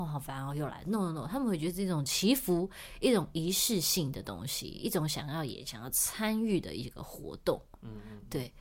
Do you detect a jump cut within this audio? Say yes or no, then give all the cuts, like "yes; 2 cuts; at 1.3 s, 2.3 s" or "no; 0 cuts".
no; 0 cuts